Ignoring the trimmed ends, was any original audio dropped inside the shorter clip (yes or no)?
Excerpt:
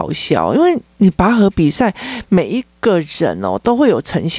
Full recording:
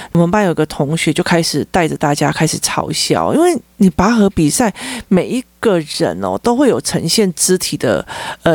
no